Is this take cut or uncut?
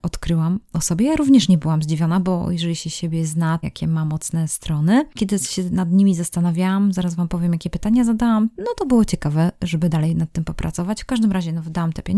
cut